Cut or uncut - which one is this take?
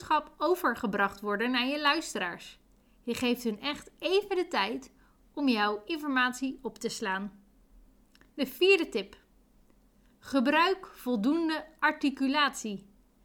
uncut